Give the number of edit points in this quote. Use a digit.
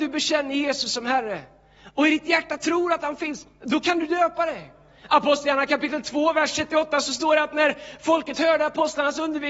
0